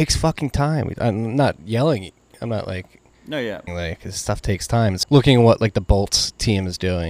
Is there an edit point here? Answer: yes; 2 cuts; at 3.7 s, 5.0 s

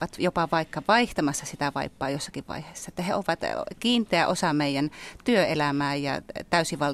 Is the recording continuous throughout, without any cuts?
yes; 0 cuts

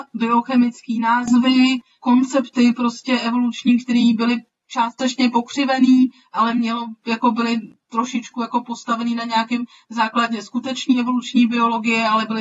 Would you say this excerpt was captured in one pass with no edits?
yes; 0 cuts

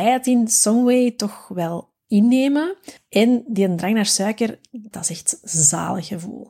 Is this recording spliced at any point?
yes; 2 cuts; at 3.0 s, 4.9 s

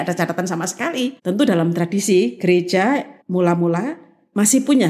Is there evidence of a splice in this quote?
yes; 2 cuts; at 1.2 s, 3.2 s

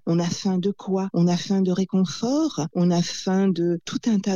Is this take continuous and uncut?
no; 1 cut; at 2.7 s

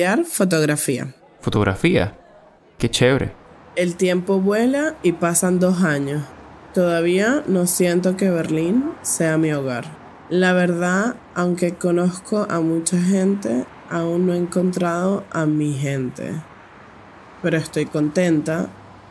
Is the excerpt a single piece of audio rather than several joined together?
yes; 0 cuts

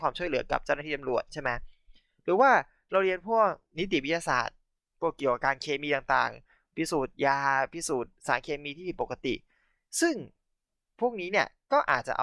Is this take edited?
no; 0 cuts

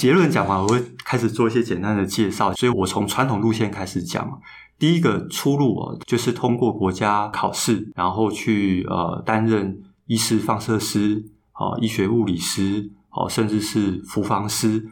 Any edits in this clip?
yes; 1 cut; at 2.7 s

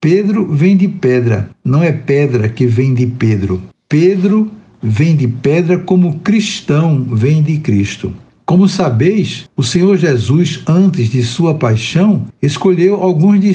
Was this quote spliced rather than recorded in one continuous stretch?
no; 0 cuts

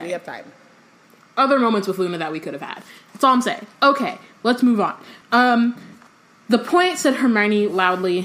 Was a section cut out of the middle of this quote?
no; 0 cuts

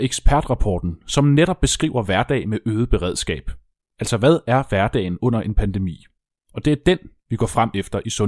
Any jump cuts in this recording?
no; 0 cuts

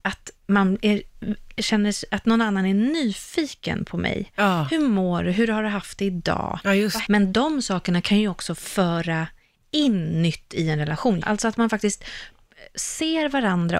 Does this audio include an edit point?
yes; 2 cuts; at 7.0 s, 11.2 s

